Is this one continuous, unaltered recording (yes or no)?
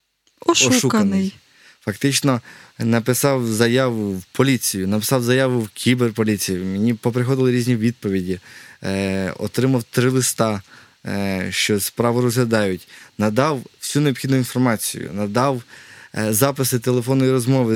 yes